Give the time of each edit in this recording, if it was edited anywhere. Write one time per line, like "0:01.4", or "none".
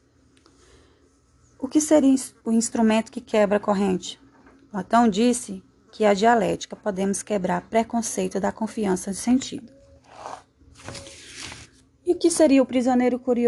0:02.4
0:06.7